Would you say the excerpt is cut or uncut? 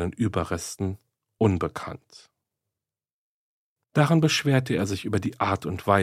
cut